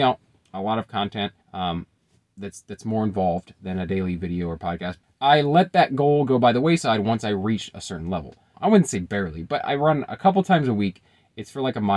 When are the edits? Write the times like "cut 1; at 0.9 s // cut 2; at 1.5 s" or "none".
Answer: cut 1; at 1.4 s // cut 2; at 5.0 s // cut 3; at 8.5 s